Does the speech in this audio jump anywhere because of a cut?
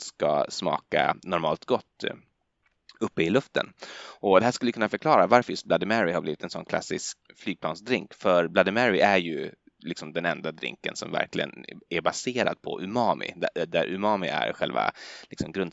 yes; 1 cut; at 7.2 s

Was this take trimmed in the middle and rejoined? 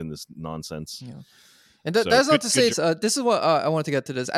yes; 1 cut; at 2.7 s

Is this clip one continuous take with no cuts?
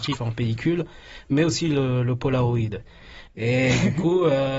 no; 1 cut; at 3.3 s

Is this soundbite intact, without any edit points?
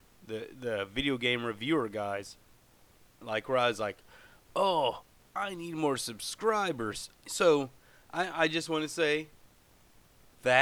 no; 2 cuts; at 3.2 s, 7.2 s

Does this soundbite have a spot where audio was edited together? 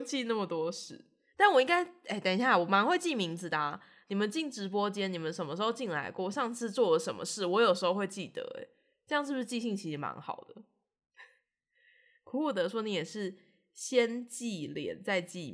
no; 0 cuts

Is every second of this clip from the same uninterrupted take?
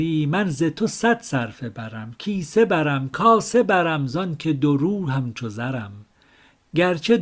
yes; 0 cuts

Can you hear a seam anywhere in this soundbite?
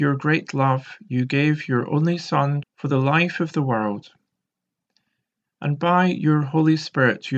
yes; 1 cut; at 2.6 s

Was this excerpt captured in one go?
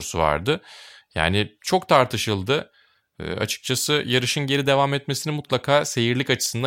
yes; 0 cuts

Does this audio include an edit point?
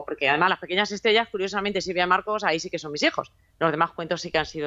no; 0 cuts

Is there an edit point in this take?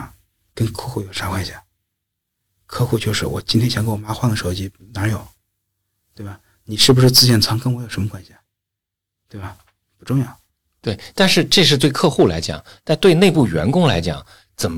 no; 0 cuts

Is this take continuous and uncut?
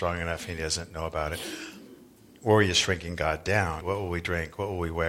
no; 1 cut; at 3.8 s

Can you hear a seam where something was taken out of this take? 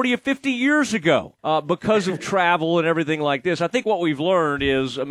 yes; 1 cut; at 1.4 s

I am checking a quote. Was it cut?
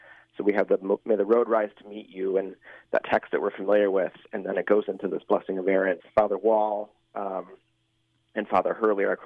yes; 1 cut; at 6.0 s

